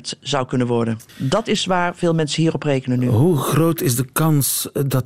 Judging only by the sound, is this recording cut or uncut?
cut